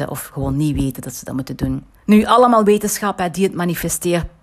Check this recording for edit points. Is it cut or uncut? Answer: cut